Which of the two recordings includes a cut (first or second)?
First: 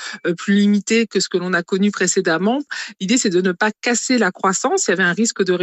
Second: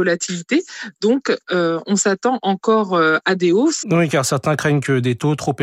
second